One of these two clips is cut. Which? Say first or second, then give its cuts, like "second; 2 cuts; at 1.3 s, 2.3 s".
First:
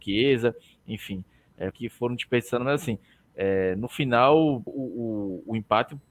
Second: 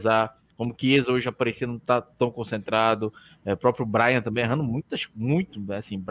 first; 2 cuts; at 1.7 s, 4.7 s